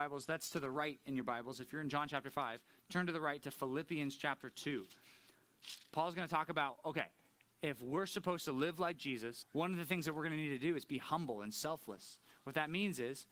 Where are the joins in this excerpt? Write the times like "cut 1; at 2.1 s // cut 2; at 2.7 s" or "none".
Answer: cut 1; at 9.4 s